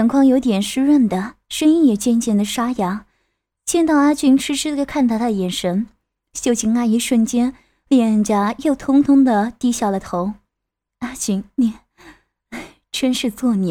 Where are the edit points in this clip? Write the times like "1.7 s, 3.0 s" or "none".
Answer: none